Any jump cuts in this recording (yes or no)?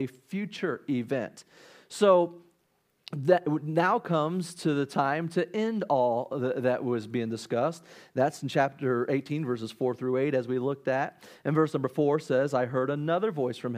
no